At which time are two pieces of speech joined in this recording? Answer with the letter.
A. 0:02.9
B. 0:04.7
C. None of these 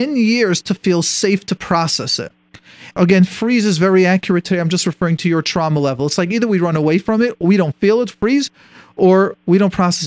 A